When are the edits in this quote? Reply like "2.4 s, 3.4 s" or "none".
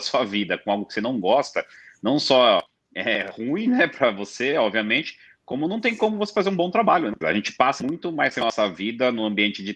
7.2 s